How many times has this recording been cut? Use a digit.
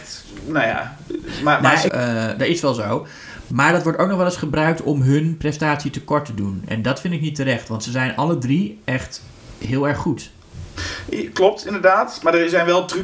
1